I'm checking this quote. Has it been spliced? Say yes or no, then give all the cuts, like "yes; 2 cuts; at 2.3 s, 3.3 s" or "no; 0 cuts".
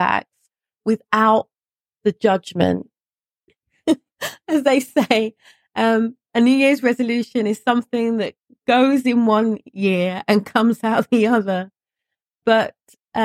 yes; 1 cut; at 3.5 s